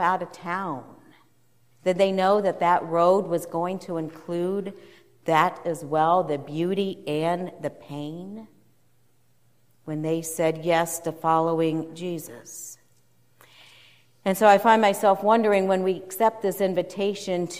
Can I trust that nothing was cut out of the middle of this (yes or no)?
no